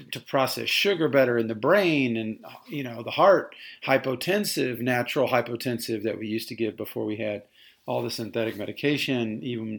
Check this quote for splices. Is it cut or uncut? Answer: uncut